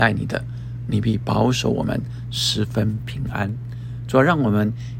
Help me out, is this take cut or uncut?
uncut